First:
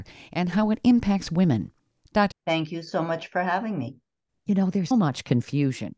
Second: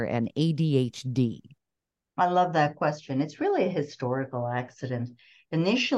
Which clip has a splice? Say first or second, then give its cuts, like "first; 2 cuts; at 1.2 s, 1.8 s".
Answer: first; 2 cuts; at 2.3 s, 4.9 s